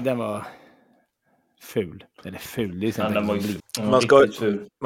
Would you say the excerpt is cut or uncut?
cut